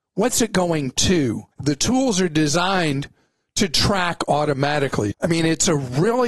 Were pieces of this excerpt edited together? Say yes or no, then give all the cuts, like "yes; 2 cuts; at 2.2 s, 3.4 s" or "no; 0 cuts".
yes; 2 cuts; at 1.5 s, 5.1 s